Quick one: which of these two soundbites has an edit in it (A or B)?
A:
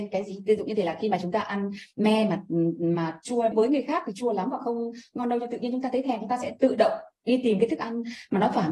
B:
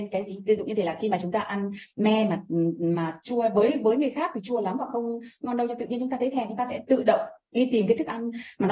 A